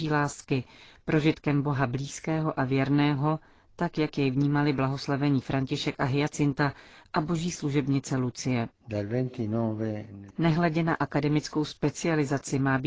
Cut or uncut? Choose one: cut